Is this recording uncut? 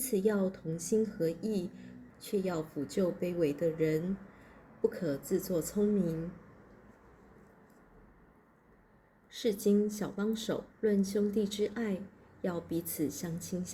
no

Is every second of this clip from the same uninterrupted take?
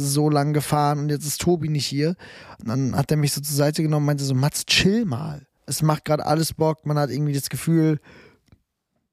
no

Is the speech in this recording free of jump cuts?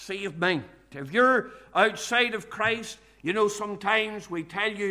no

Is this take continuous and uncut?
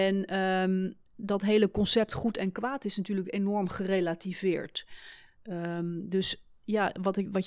no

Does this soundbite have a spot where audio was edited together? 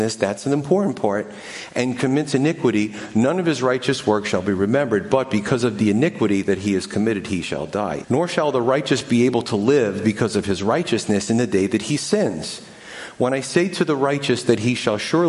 yes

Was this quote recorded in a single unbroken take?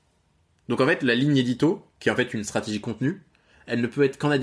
no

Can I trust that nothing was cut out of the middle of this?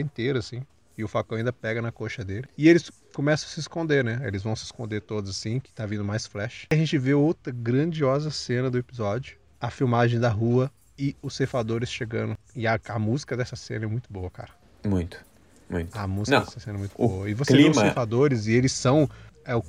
yes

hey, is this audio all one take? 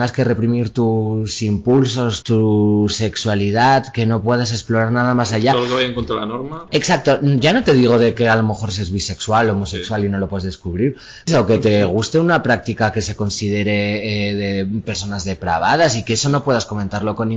no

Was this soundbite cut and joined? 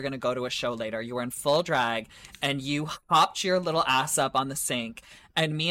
no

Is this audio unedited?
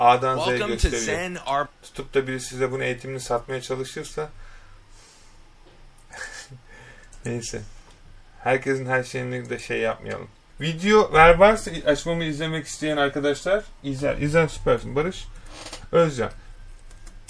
no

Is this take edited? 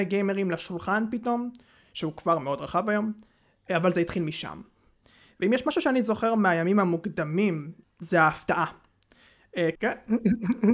yes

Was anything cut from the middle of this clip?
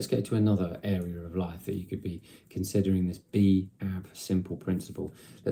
yes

